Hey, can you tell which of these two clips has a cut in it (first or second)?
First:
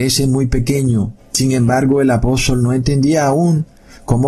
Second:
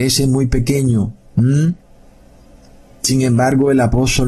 first